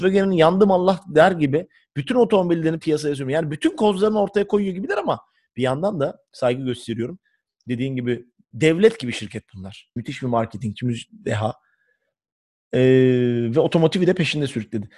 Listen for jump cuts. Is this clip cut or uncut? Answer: cut